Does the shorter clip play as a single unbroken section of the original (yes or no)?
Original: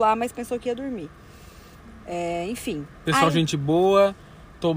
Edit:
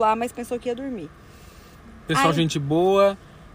no